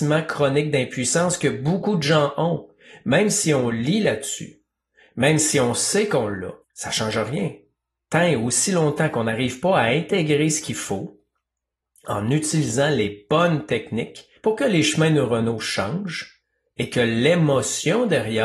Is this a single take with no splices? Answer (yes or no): no